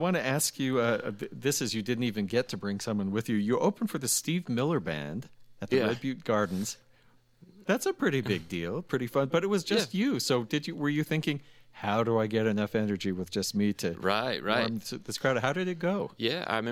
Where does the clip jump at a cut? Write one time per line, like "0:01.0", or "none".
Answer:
none